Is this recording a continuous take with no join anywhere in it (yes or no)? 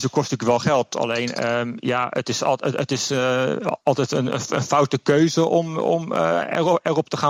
yes